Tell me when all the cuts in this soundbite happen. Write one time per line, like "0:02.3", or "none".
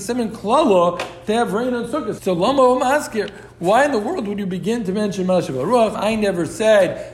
0:02.2
0:05.9